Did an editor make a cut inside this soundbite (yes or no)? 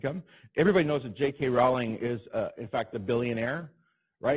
no